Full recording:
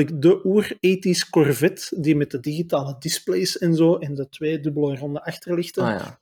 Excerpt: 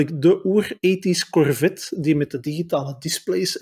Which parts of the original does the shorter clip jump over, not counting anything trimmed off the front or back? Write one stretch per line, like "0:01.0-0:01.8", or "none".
none